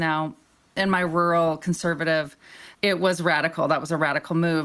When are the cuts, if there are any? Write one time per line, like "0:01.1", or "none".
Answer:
0:02.7